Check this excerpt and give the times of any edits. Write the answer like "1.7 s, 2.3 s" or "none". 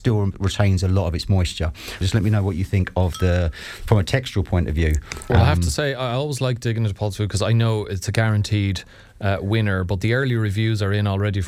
2.0 s